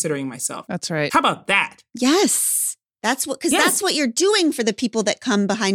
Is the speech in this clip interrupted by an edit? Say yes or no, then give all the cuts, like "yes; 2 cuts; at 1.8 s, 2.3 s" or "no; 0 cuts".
no; 0 cuts